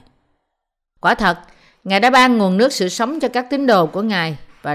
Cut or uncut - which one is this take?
cut